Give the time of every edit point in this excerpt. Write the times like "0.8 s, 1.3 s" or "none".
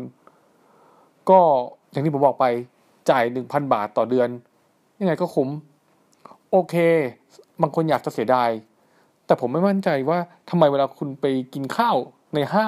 1.8 s